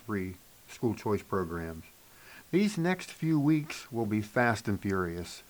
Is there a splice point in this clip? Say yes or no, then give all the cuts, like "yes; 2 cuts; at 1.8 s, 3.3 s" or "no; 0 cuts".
yes; 1 cut; at 2.4 s